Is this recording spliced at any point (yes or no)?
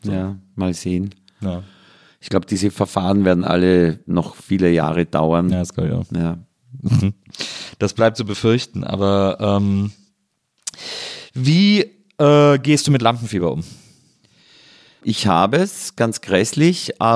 no